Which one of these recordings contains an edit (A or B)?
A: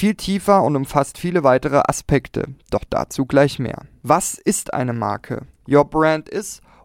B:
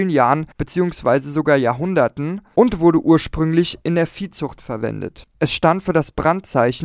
A